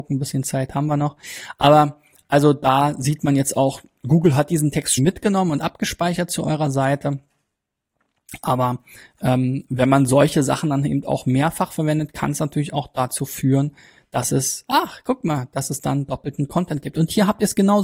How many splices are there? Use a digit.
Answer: 1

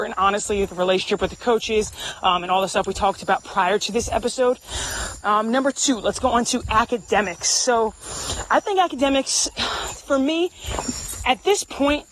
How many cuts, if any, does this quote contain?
1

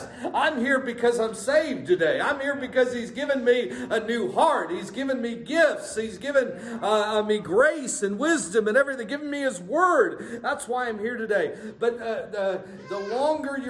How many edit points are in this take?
0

